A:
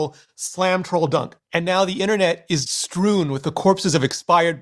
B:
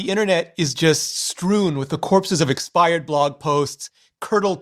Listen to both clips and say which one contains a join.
A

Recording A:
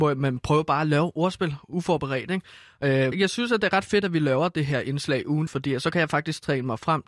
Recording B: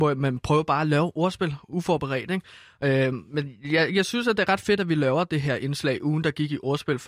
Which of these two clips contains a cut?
A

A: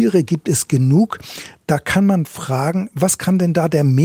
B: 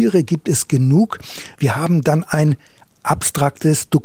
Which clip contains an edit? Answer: B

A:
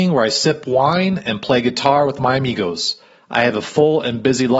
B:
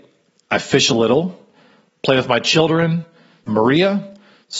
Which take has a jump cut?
B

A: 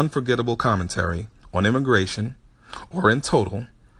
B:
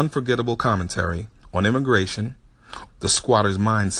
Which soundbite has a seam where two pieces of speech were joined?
B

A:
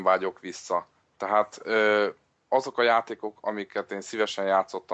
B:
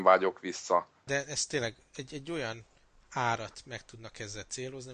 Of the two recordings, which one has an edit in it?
B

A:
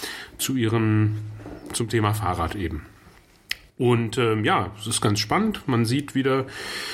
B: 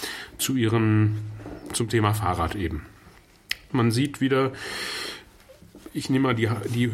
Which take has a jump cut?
B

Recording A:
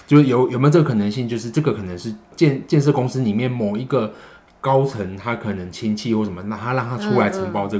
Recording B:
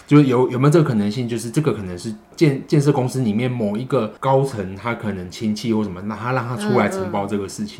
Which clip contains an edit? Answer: B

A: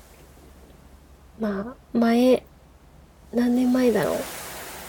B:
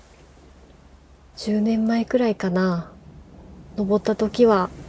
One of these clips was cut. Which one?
B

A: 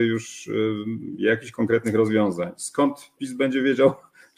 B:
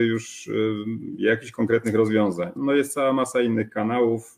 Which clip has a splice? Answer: B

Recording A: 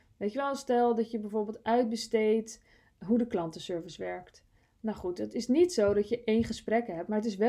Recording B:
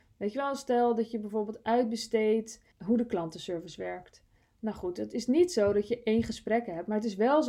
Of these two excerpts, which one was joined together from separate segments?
B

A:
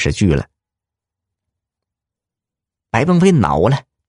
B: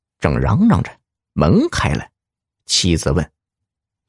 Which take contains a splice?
A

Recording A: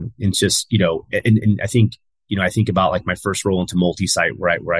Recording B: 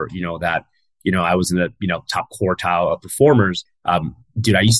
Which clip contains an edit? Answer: B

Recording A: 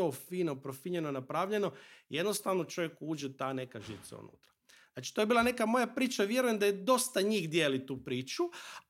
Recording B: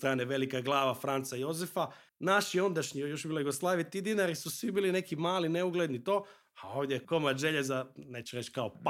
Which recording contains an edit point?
B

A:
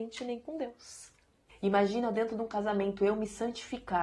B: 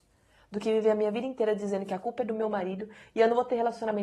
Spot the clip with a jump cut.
A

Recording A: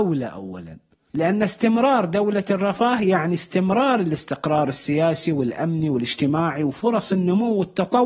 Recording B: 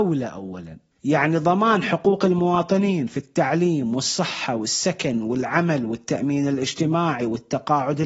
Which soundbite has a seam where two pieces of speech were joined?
B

